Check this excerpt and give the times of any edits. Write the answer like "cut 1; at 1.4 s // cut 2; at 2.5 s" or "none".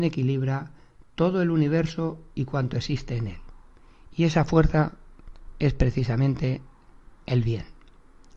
none